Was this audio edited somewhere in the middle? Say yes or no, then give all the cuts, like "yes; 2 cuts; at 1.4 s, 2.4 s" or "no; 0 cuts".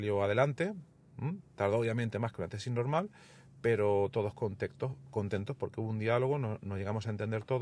no; 0 cuts